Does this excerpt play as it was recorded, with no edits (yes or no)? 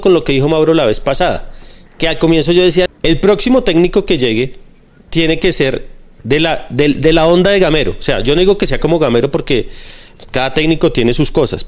no